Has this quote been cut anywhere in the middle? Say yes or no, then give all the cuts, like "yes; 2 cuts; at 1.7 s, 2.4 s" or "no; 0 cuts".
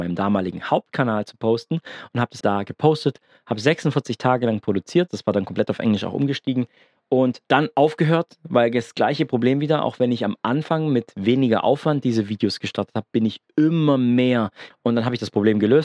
yes; 3 cuts; at 2.4 s, 5.1 s, 14.7 s